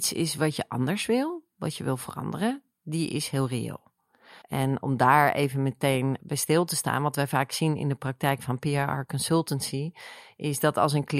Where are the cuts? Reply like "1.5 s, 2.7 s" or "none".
4.4 s, 6.2 s